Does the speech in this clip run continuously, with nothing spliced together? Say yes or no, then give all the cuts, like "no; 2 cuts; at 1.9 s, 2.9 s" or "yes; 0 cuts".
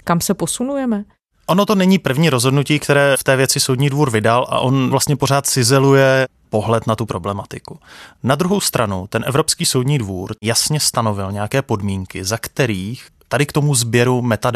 no; 1 cut; at 8.1 s